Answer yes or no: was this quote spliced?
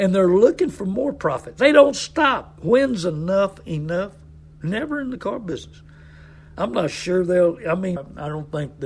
yes